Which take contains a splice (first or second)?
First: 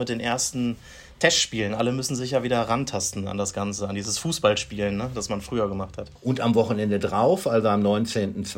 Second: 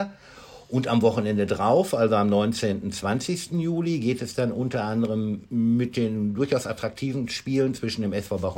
first